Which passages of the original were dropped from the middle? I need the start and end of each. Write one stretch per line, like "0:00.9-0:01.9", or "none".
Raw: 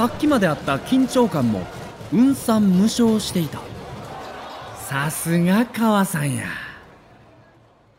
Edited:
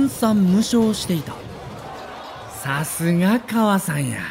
none